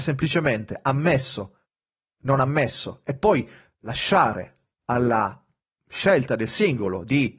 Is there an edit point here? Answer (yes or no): no